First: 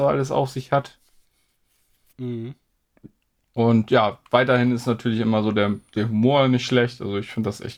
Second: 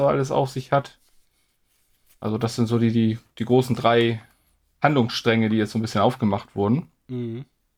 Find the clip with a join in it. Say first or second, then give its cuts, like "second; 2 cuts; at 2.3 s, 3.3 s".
first; 1 cut; at 2.1 s